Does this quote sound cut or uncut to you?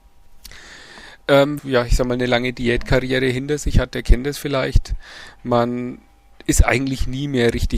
cut